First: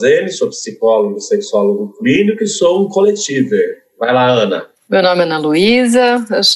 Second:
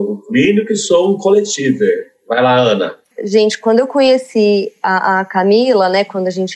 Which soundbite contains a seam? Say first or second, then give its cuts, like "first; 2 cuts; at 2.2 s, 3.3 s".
second; 1 cut; at 3.1 s